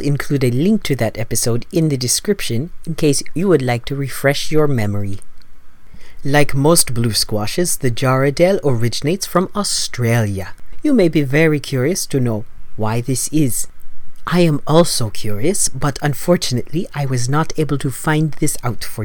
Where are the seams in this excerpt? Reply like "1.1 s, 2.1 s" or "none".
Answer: none